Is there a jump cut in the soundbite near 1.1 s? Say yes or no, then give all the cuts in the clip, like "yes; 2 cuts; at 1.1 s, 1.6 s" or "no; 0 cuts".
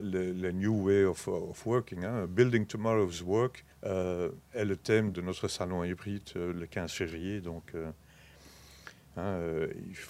no; 2 cuts; at 3.7 s, 5.1 s